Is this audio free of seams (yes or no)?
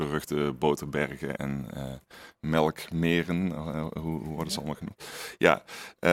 no